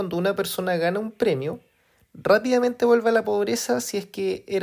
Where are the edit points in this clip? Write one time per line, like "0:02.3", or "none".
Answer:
none